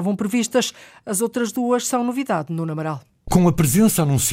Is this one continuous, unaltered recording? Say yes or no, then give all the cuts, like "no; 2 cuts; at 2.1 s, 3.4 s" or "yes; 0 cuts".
yes; 0 cuts